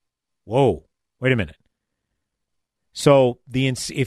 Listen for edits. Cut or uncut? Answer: uncut